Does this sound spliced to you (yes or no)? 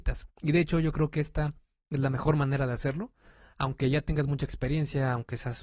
no